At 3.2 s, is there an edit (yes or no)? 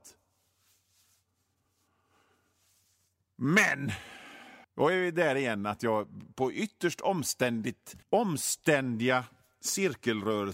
no